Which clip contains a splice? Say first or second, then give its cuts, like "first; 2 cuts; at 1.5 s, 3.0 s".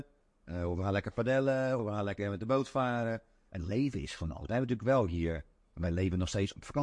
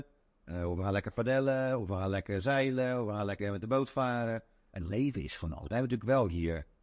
first; 1 cut; at 1.8 s